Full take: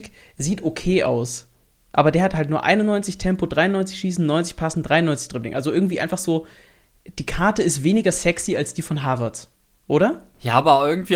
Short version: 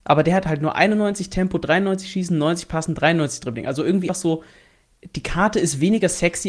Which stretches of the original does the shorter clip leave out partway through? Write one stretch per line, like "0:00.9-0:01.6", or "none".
0:06.0-0:06.1